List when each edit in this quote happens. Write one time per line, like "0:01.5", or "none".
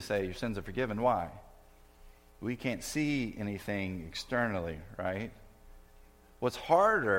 none